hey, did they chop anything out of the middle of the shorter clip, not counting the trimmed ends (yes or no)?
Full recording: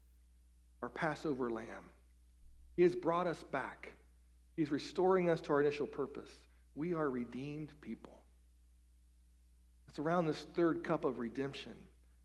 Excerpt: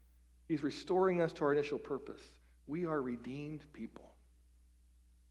no